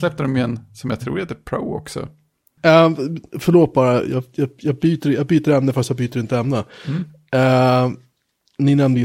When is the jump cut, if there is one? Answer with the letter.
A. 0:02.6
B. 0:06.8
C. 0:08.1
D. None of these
A